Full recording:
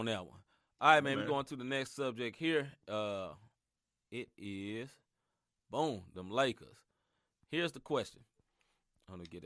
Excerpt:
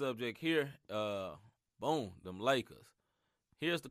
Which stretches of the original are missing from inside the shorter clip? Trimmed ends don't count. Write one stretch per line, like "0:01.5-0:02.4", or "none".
0:03.6-0:05.6